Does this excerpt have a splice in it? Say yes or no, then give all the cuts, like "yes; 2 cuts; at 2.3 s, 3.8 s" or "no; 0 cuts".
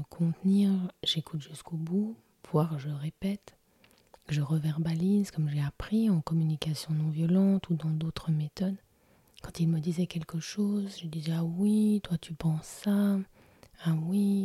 yes; 1 cut; at 9.3 s